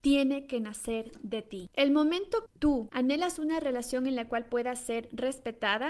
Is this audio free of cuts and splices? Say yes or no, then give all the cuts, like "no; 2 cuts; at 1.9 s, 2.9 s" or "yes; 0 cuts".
yes; 0 cuts